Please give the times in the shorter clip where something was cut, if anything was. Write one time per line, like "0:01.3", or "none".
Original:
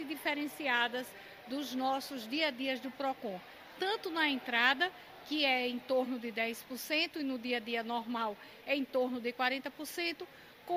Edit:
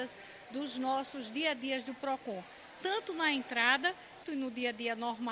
0:04.2